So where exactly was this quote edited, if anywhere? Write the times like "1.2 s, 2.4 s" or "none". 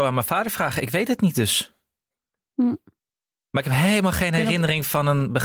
none